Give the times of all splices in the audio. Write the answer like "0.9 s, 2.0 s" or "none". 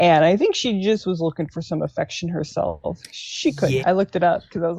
3.8 s